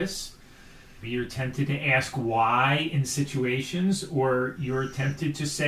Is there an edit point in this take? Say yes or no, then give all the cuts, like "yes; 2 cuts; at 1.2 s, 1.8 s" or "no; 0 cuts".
yes; 1 cut; at 1.0 s